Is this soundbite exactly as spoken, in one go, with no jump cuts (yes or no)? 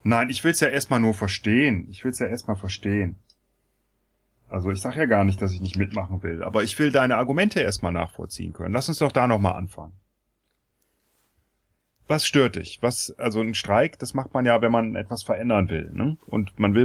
yes